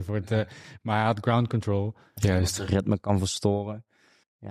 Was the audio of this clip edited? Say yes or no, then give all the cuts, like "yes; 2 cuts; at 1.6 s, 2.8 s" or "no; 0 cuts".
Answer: yes; 1 cut; at 2.2 s